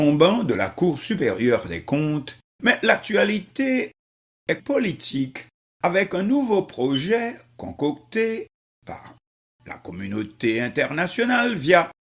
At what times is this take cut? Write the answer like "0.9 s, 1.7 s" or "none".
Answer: 2.5 s, 4.6 s